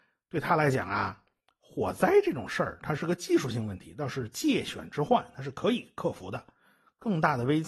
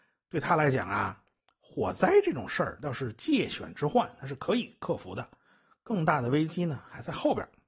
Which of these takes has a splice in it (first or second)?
second